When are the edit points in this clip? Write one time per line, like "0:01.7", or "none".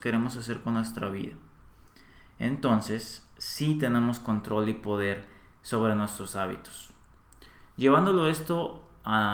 none